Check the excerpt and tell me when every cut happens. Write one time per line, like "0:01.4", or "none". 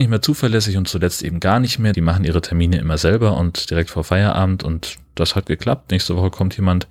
0:01.9